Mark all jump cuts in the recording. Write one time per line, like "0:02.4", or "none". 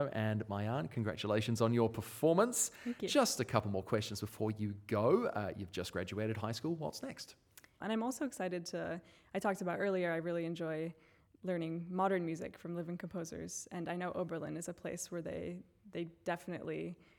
0:07.8